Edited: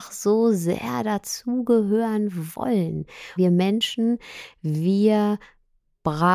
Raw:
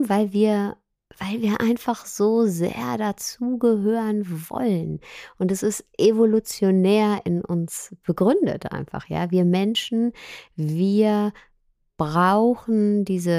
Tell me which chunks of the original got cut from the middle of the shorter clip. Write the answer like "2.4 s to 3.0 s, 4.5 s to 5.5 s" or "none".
5.3 s to 9.3 s